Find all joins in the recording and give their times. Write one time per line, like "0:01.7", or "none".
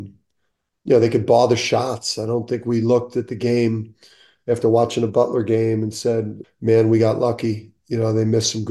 0:06.4